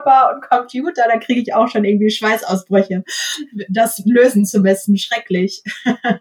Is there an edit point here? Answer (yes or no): no